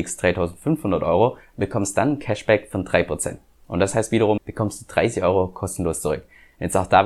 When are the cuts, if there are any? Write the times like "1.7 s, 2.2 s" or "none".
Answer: 4.4 s